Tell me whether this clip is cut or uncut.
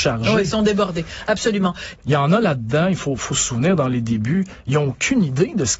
cut